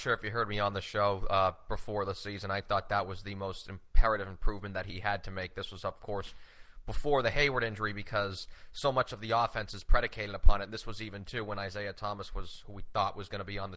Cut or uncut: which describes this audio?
uncut